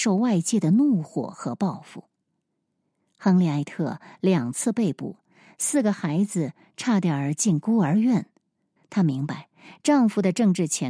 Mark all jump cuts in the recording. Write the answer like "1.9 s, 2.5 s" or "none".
8.8 s